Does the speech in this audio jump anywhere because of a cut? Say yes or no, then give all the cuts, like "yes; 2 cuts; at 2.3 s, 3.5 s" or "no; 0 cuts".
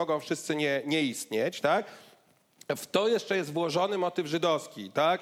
no; 0 cuts